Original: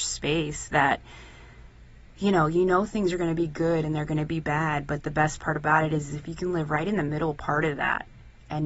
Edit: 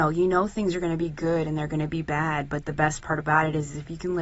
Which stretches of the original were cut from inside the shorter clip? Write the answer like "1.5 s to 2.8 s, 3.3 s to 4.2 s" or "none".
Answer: none